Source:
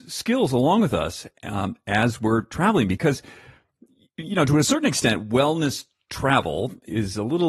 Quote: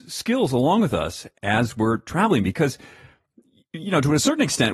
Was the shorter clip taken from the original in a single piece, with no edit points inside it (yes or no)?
no